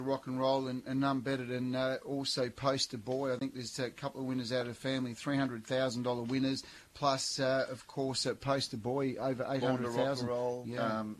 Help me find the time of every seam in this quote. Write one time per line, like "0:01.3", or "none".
none